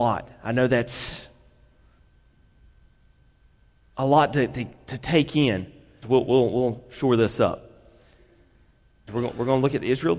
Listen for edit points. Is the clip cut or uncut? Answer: cut